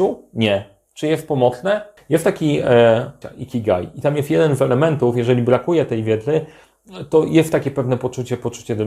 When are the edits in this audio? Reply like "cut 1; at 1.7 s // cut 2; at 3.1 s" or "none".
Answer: cut 1; at 2.0 s // cut 2; at 3.2 s